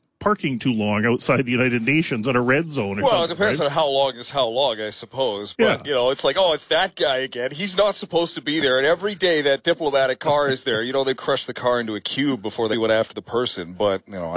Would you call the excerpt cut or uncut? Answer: cut